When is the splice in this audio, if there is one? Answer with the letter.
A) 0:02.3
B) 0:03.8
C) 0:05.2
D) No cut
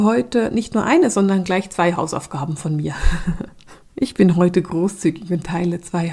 D